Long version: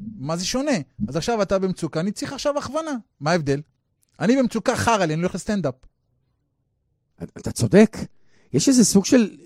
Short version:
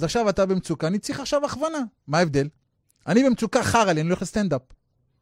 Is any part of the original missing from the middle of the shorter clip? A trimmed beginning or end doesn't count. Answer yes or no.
no